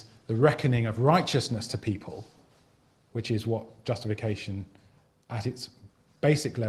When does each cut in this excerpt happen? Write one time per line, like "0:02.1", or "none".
none